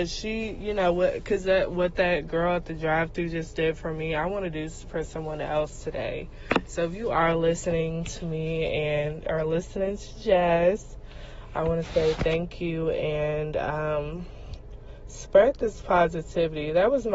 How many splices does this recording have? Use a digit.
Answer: 0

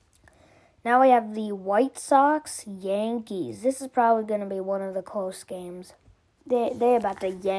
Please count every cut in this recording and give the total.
1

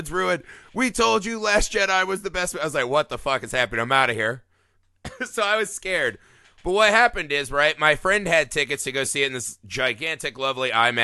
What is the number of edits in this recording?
0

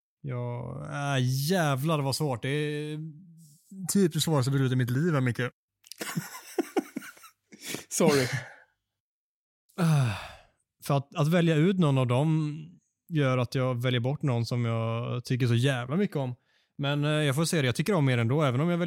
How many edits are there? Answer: 0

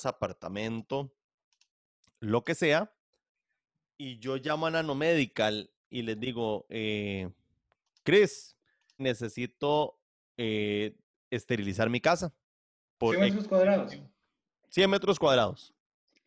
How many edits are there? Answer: 1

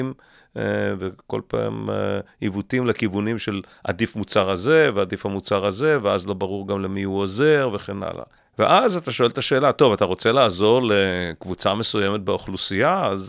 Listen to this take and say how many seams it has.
1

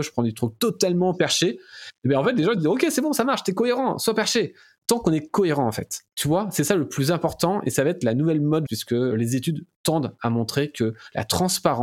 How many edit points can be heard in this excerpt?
2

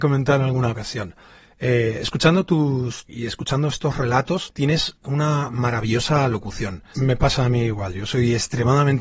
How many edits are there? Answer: 2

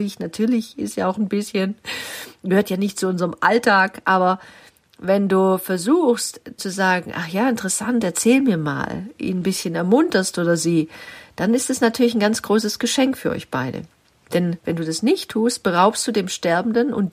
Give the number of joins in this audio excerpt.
1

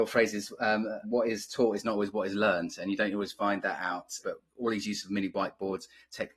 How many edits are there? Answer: 2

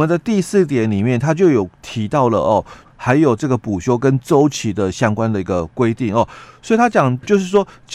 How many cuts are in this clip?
1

